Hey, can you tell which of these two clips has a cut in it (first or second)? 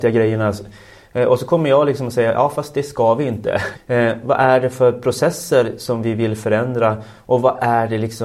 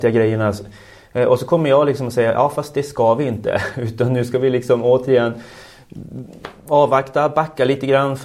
first